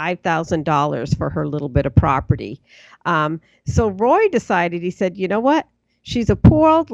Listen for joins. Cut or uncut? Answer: uncut